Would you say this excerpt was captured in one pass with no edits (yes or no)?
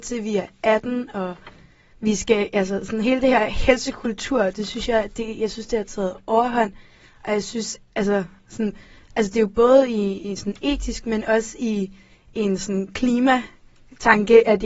yes